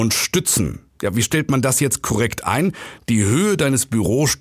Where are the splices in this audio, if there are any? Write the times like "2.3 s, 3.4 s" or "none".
none